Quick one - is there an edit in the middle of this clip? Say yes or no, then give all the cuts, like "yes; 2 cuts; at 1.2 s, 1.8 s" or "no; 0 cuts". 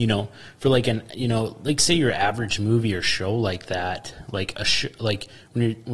no; 0 cuts